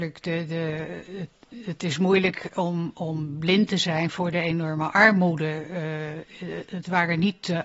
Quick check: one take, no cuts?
yes; 0 cuts

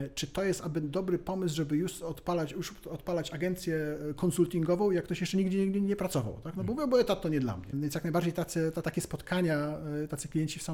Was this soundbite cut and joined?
yes; 2 cuts; at 7.7 s, 8.8 s

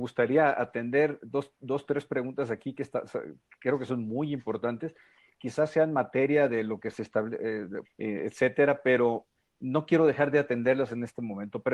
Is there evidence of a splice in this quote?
yes; 1 cut; at 7.8 s

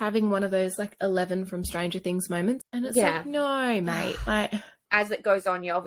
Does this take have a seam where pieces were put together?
yes; 1 cut; at 2.6 s

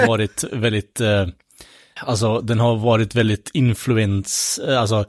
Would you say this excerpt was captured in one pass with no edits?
no; 1 cut; at 2.0 s

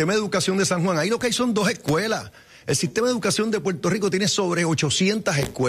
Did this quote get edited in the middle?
no; 0 cuts

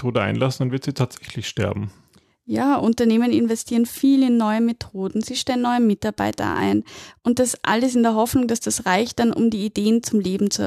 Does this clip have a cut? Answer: no; 0 cuts

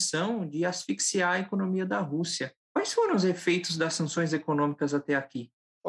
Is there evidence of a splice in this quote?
no; 0 cuts

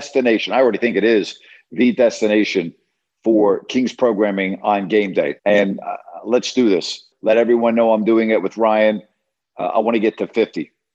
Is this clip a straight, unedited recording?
no; 2 cuts; at 5.4 s, 7.1 s

